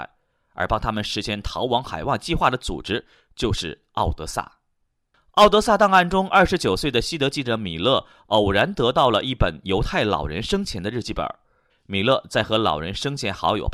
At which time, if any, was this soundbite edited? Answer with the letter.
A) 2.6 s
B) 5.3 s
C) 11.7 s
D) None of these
C